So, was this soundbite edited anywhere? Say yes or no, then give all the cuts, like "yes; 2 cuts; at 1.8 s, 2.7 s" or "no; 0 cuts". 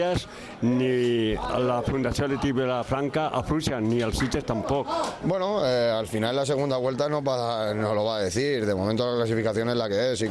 yes; 1 cut; at 5.2 s